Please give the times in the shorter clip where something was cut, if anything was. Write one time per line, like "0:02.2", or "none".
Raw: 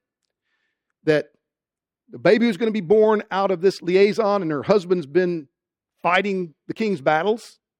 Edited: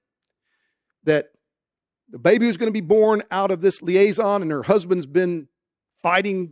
none